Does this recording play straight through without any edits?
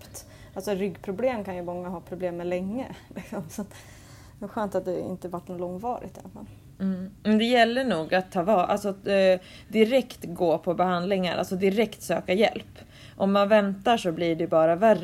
yes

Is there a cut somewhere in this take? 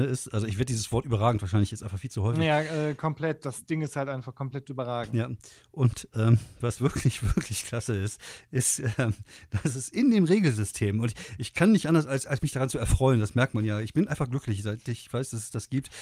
no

